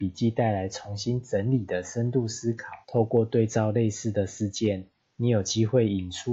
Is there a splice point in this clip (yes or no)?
yes